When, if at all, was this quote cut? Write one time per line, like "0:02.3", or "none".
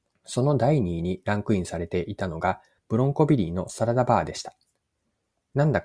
none